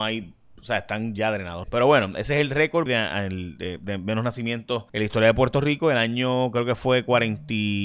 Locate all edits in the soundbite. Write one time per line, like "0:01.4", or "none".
0:01.6
0:02.9
0:04.9